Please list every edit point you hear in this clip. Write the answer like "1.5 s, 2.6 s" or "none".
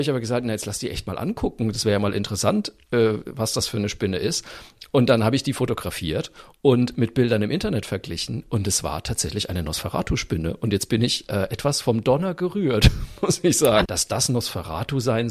13.8 s